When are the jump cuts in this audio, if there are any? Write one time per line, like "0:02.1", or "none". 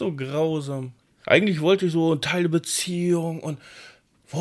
0:01.2